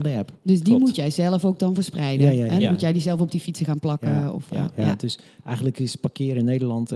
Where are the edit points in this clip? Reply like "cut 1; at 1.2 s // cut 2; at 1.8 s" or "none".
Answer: none